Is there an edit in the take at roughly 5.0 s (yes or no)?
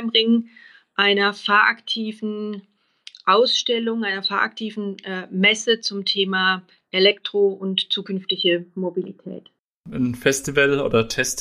no